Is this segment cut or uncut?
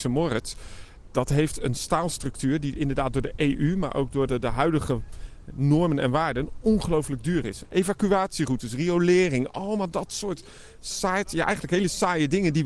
cut